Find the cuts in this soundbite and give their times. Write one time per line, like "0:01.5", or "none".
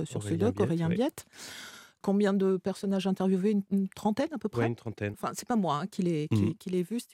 0:02.0
0:05.1